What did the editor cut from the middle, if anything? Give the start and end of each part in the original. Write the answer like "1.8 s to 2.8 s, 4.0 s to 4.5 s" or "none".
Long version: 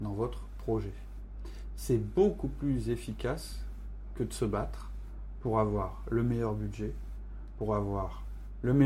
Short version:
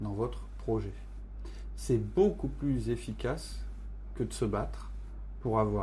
none